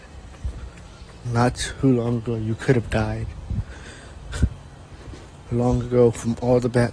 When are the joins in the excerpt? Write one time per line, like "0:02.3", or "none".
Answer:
0:01.2

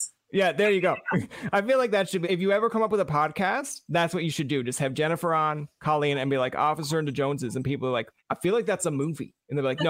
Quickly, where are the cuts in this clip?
0:02.2
0:08.2

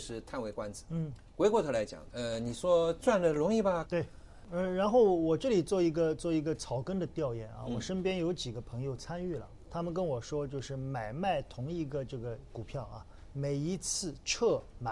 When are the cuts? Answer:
0:02.1
0:03.9

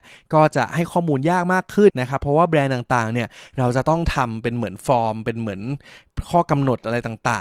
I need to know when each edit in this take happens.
0:01.9

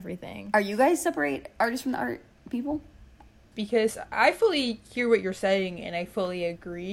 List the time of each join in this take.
0:03.5

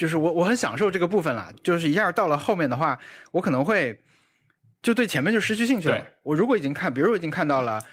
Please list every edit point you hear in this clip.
0:01.5

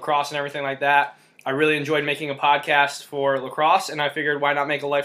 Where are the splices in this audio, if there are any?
none

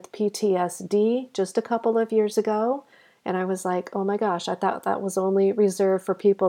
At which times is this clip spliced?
none

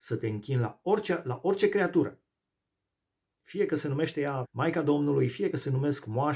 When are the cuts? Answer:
0:04.4

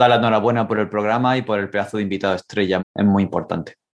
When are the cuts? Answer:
0:02.8

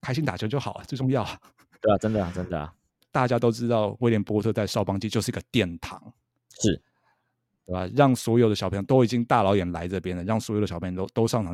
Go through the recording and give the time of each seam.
none

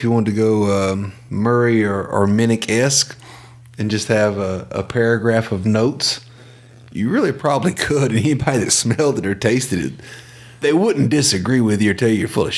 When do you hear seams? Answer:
none

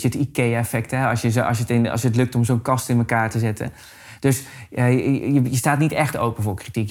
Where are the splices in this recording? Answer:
none

